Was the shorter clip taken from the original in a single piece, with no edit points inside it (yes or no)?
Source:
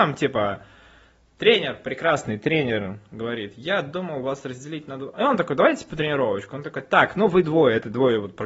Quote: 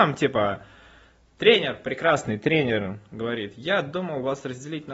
yes